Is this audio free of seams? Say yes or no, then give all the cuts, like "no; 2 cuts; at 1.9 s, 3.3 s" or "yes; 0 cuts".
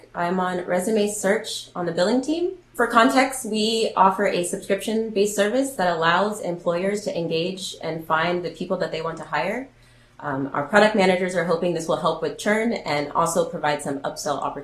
no; 1 cut; at 10.1 s